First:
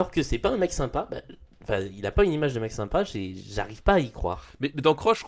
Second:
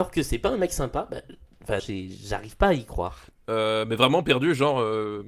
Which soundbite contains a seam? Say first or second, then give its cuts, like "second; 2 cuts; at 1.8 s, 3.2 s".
second; 2 cuts; at 1.8 s, 3.3 s